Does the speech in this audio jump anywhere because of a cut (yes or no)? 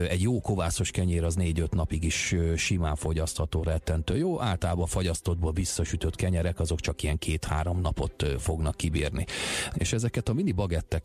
yes